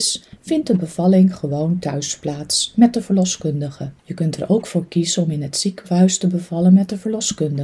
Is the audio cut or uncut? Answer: cut